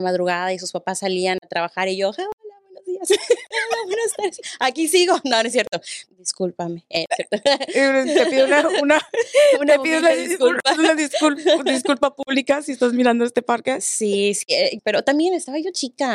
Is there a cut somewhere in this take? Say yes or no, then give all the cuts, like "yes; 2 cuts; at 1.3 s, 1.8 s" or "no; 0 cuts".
yes; 2 cuts; at 6.1 s, 14.8 s